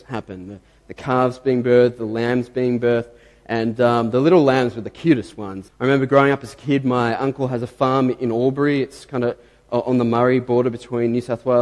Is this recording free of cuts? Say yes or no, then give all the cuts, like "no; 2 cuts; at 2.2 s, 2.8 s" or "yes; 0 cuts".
no; 1 cut; at 5.7 s